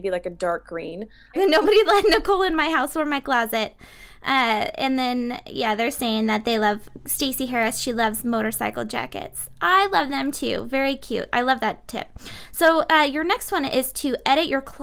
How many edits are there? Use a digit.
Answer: 1